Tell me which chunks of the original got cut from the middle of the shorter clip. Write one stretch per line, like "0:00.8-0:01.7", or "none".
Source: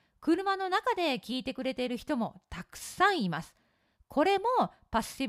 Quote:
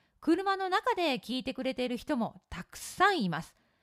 none